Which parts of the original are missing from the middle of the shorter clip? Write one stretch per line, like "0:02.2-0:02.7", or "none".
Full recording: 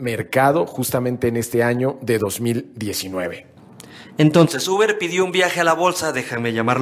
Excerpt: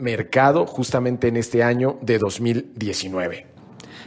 none